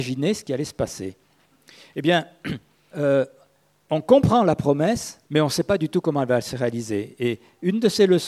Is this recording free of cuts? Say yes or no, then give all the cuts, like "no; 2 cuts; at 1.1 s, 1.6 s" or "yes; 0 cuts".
no; 2 cuts; at 2.9 s, 5.2 s